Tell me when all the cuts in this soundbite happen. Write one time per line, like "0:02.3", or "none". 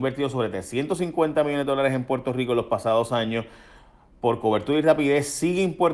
none